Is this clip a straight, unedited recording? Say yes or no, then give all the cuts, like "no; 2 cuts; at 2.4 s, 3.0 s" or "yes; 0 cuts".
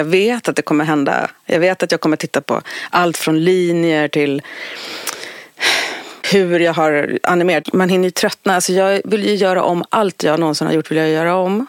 no; 2 cuts; at 6.2 s, 7.6 s